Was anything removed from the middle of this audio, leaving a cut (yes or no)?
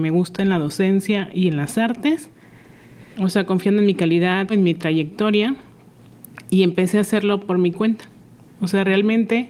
yes